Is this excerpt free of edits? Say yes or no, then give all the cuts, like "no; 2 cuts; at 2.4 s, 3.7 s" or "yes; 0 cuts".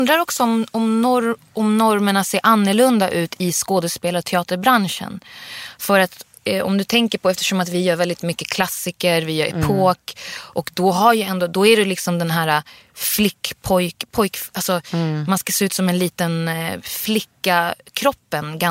yes; 0 cuts